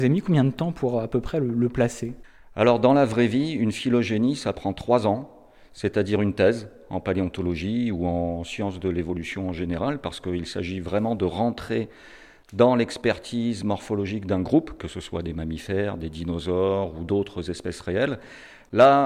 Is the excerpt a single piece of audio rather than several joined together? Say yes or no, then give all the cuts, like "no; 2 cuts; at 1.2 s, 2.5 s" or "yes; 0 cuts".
yes; 0 cuts